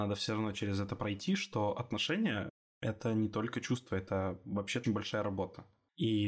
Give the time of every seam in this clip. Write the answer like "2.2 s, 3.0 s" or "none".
4.8 s